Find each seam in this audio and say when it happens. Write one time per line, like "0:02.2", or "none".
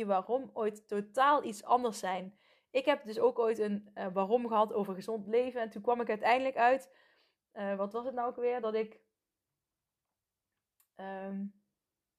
none